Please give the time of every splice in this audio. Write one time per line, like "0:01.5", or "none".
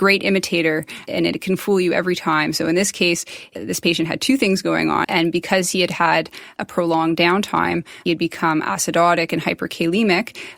0:05.0